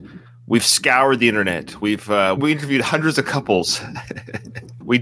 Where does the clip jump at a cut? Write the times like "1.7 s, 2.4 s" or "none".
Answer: 2.4 s